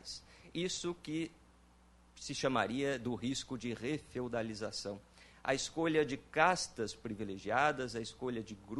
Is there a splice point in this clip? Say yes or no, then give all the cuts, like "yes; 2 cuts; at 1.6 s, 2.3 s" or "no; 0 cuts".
no; 0 cuts